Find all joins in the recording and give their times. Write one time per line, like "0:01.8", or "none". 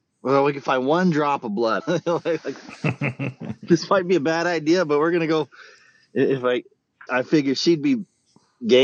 0:01.8
0:07.1